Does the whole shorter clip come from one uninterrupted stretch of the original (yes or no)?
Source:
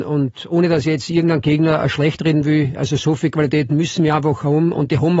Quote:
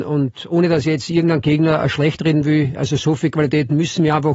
yes